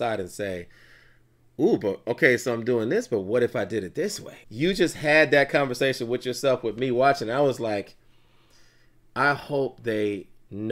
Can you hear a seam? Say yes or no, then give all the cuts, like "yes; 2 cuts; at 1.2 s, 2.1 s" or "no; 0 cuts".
yes; 1 cut; at 4.4 s